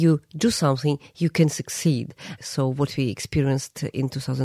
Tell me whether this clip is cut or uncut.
cut